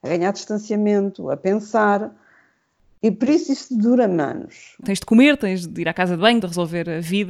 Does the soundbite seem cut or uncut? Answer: cut